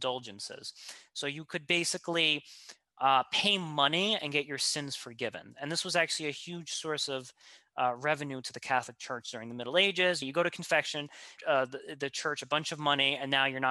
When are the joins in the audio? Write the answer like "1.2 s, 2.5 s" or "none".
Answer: 10.2 s, 11.4 s